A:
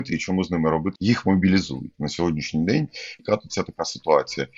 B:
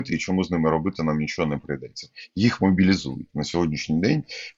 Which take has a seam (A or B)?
A